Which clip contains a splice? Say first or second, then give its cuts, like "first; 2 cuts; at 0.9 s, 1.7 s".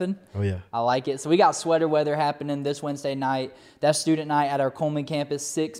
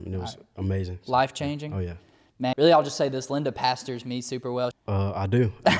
second; 2 cuts; at 2.5 s, 4.7 s